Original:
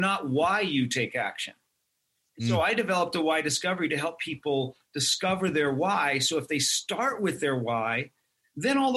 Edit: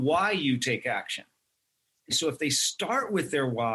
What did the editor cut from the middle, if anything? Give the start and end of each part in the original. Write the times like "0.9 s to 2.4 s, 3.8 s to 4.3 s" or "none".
2.4 s to 6.2 s